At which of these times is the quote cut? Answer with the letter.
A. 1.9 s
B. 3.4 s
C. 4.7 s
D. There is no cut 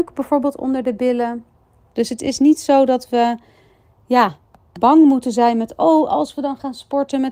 A